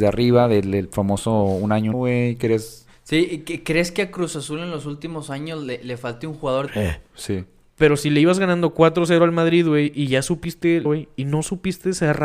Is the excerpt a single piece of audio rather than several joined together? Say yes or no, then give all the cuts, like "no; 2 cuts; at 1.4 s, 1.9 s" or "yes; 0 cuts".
no; 3 cuts; at 1.9 s, 6.7 s, 10.8 s